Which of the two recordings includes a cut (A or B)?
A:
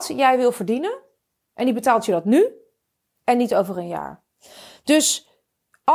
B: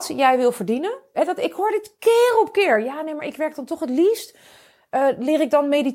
B